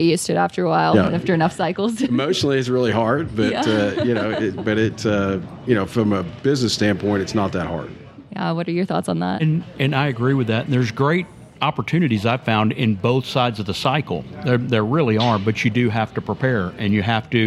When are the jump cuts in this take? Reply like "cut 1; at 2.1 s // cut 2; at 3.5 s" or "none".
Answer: none